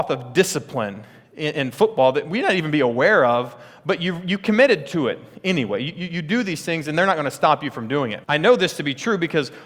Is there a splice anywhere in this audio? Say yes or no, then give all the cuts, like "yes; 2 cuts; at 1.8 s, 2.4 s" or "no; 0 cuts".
yes; 1 cut; at 8.2 s